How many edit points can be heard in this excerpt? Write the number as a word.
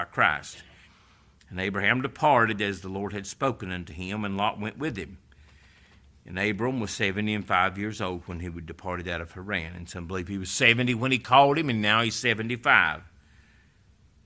zero